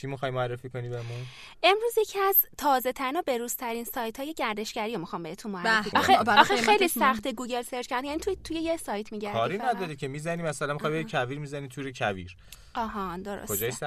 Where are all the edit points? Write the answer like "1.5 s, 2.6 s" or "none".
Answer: 5.9 s